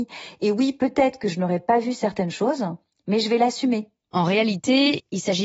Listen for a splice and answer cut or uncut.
cut